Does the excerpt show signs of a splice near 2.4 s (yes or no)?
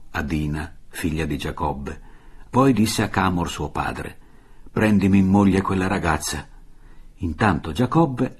yes